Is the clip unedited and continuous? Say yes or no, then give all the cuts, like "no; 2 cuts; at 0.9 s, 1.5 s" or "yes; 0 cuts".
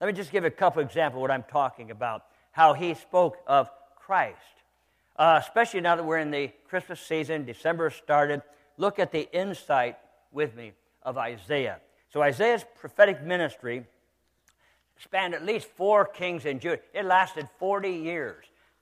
no; 1 cut; at 12.0 s